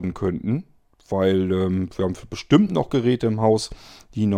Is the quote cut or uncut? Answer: uncut